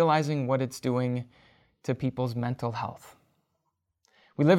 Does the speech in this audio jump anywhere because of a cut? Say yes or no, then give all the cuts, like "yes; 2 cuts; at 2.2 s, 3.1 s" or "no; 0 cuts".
no; 0 cuts